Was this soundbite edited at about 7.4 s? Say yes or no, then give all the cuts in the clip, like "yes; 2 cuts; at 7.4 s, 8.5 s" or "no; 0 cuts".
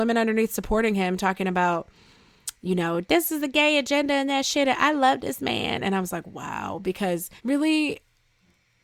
yes; 1 cut; at 7.4 s